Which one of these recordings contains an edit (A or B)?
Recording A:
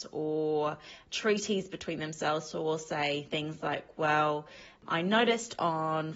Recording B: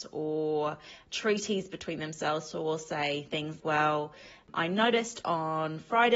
B